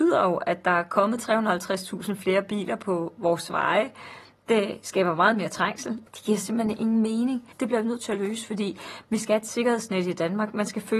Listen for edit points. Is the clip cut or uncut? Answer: cut